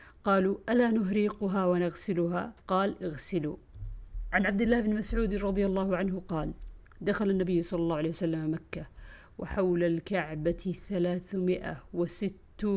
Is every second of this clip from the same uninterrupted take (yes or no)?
no